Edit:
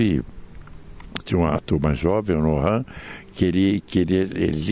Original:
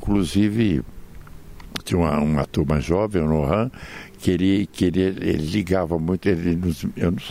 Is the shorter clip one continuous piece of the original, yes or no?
no